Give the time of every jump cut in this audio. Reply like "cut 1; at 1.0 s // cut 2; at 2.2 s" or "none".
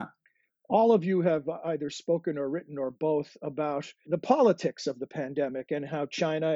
cut 1; at 4.1 s